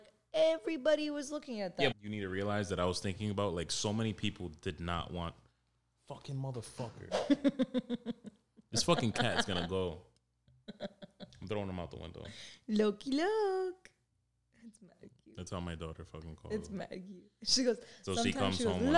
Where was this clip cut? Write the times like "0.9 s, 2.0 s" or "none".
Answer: 1.9 s

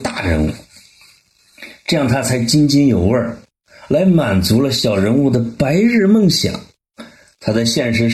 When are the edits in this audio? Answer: none

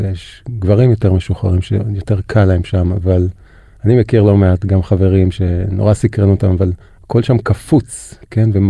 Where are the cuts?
none

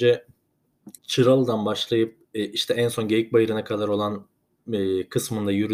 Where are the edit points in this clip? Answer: 1.0 s

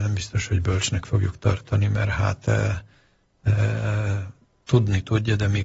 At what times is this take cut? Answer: none

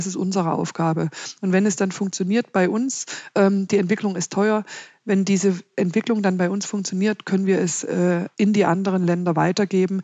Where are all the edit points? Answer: 8.3 s

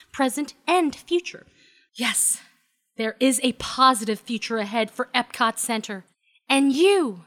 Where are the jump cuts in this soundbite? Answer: 1.9 s

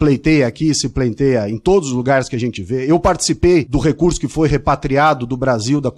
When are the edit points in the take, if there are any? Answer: none

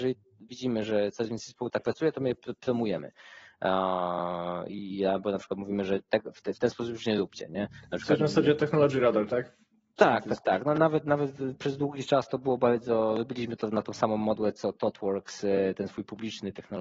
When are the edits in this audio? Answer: none

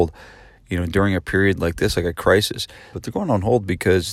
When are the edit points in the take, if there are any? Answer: 2.9 s

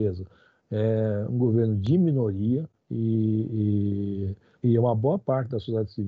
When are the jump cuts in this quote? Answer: 2.8 s, 4.6 s

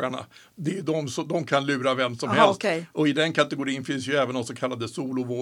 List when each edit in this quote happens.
none

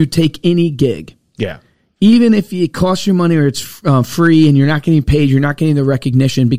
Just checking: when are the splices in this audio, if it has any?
none

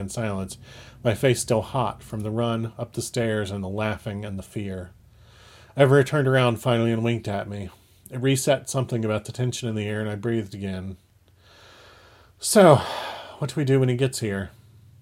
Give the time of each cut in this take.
none

